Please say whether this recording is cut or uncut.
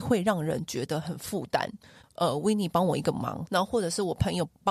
cut